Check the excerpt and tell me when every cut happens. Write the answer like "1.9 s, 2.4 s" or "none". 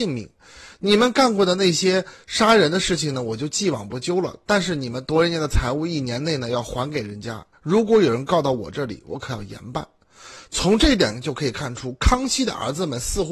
none